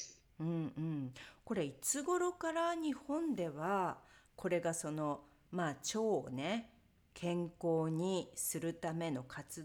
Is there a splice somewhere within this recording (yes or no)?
no